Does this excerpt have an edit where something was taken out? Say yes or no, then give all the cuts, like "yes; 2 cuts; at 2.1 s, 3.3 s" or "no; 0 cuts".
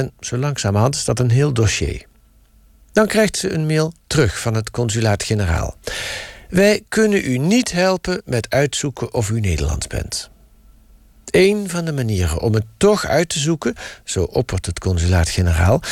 no; 0 cuts